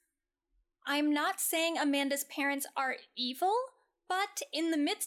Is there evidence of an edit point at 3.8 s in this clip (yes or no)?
no